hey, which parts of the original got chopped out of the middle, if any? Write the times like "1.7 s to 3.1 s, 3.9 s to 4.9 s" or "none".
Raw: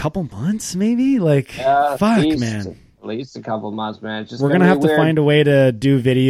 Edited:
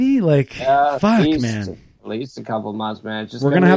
none